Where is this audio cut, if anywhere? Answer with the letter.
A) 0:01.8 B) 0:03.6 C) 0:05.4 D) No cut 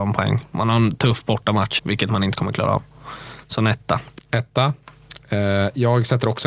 A